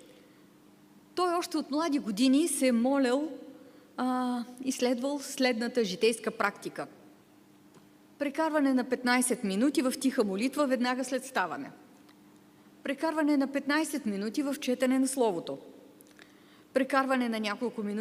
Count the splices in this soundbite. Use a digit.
0